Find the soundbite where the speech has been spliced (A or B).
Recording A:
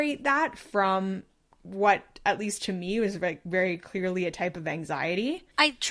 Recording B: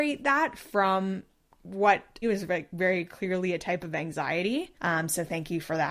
B